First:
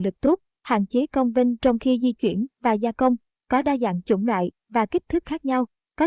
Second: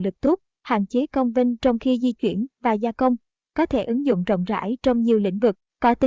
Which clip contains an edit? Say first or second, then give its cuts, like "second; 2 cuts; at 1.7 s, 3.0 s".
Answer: second; 1 cut; at 3.4 s